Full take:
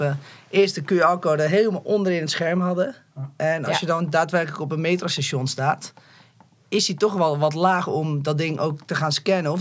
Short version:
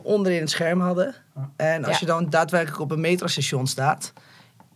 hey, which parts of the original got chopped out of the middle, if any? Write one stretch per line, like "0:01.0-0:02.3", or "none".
none